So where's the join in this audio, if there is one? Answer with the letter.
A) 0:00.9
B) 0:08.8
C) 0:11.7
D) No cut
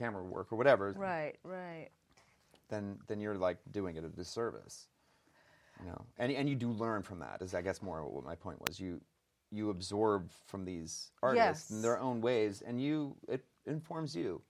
A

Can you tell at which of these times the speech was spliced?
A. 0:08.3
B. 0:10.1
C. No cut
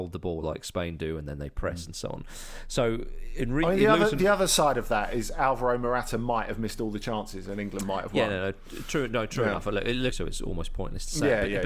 B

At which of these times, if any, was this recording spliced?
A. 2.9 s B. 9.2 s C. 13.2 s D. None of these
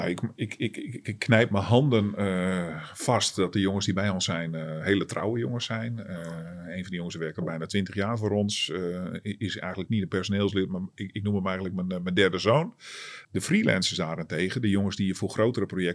C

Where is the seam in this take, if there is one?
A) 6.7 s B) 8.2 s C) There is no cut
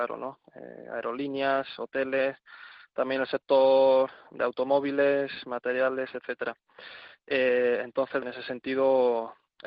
B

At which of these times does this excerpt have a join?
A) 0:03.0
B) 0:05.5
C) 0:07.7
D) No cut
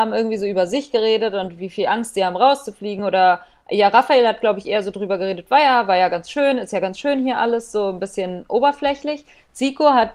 D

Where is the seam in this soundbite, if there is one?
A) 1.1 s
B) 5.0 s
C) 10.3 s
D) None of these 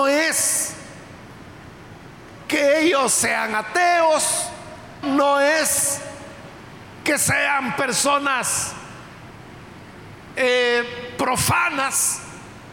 B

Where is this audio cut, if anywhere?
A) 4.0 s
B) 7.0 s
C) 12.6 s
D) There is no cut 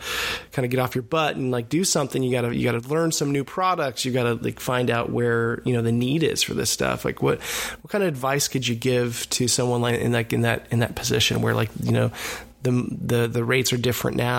D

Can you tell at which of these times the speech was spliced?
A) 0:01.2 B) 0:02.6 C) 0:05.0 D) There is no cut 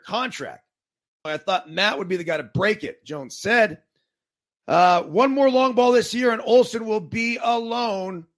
A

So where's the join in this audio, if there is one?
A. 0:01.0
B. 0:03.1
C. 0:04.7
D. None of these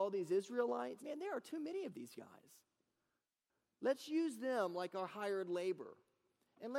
A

